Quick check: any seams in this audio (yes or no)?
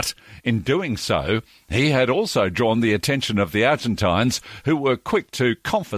no